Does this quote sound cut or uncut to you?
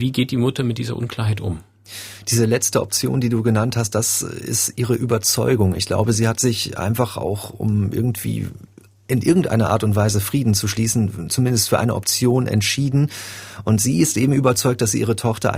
uncut